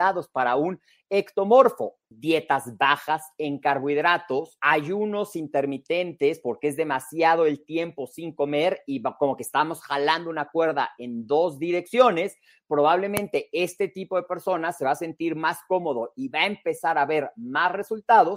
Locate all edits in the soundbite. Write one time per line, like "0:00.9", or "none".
0:04.6